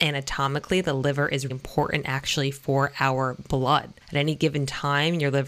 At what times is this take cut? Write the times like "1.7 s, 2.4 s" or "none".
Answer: 1.5 s, 4.0 s

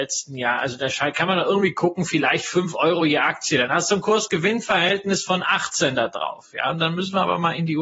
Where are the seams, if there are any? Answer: none

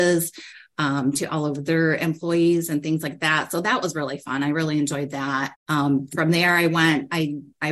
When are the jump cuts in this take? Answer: 5.5 s

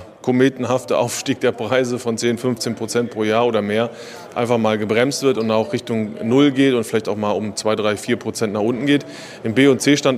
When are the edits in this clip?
none

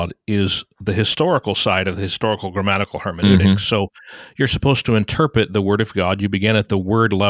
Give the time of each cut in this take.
none

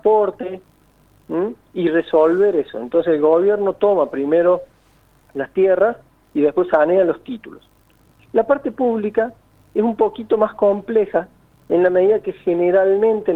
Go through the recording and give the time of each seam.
none

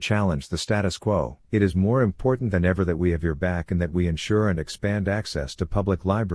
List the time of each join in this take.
1.4 s

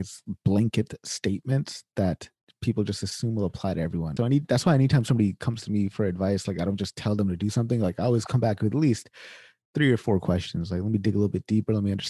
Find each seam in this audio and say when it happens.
4.2 s

